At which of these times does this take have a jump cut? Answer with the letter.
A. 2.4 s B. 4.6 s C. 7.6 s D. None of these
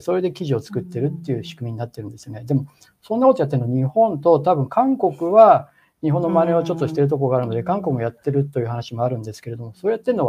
D